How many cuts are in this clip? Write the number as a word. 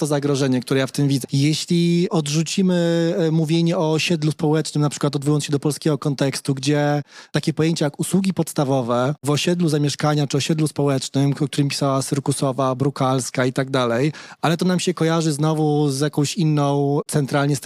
one